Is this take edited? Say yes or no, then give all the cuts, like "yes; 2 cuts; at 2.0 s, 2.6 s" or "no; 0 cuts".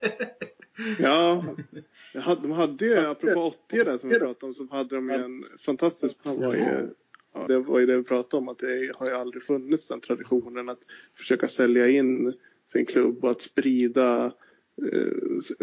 yes; 2 cuts; at 6.2 s, 7.5 s